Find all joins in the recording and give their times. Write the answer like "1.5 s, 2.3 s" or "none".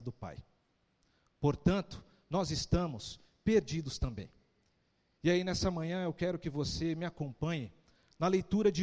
none